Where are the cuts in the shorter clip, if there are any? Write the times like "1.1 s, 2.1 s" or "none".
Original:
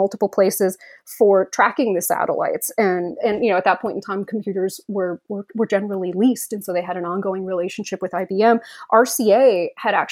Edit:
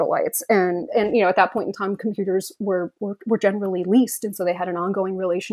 none